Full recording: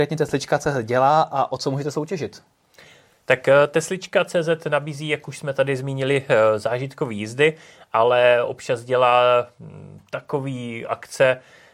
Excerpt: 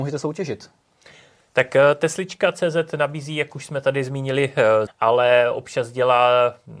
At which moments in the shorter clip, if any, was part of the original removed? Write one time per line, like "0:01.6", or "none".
0:04.9